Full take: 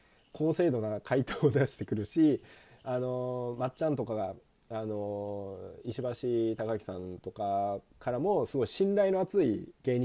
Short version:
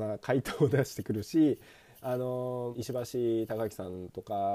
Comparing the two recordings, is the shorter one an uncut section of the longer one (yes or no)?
no